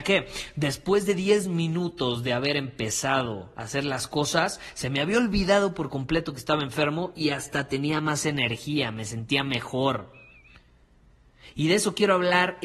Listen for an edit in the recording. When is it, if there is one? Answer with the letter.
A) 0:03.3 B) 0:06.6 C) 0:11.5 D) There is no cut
D